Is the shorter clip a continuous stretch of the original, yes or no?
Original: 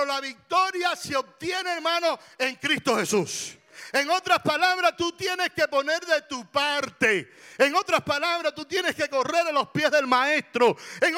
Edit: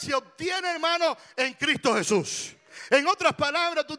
no